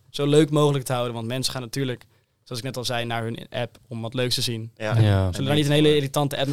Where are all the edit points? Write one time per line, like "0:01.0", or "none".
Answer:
none